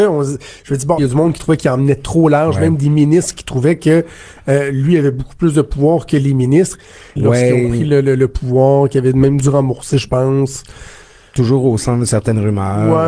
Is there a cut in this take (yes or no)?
yes